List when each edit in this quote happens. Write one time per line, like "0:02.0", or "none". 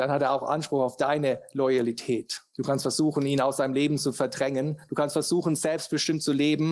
0:02.5